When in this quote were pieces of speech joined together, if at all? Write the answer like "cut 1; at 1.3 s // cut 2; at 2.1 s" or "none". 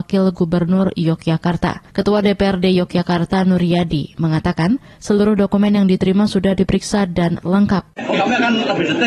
cut 1; at 1.9 s